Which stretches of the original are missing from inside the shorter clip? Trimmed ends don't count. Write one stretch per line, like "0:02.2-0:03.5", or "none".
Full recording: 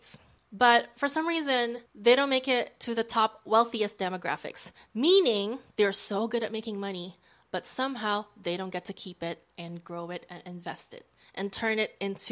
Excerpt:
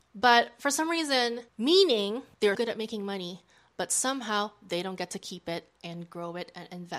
0:01.9-0:04.9
0:05.9-0:06.3